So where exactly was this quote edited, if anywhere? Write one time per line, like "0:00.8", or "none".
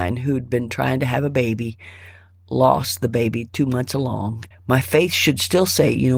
0:04.5